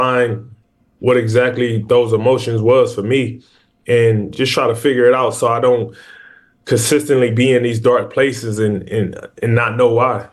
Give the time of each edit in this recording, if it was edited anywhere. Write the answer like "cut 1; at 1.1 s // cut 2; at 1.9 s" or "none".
none